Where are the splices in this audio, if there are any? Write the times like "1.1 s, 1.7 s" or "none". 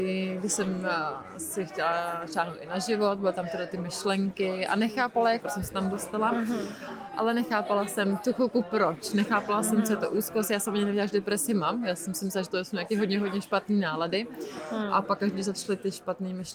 5.4 s